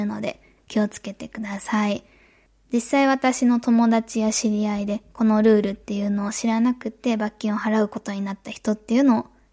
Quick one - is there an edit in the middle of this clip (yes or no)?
no